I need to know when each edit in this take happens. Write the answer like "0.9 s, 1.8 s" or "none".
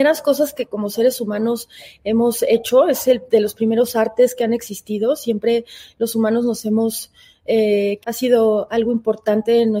8.0 s